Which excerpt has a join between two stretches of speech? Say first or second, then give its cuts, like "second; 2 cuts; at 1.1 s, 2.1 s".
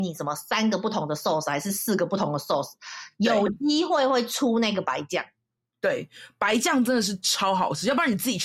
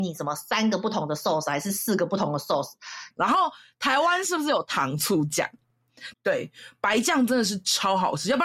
second; 2 cuts; at 3.1 s, 6.1 s